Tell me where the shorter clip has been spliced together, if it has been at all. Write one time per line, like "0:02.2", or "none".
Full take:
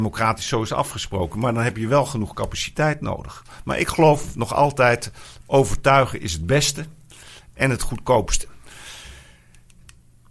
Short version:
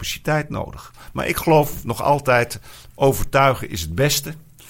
none